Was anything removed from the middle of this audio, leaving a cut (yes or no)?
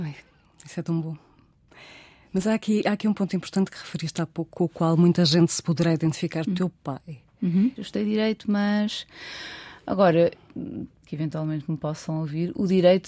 yes